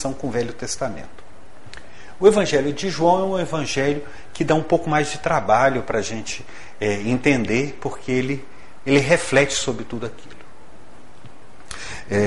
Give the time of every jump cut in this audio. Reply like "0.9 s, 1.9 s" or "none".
none